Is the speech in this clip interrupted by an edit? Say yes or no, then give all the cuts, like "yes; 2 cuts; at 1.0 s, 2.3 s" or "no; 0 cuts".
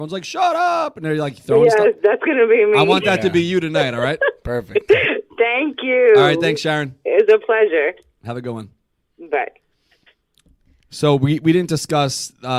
no; 0 cuts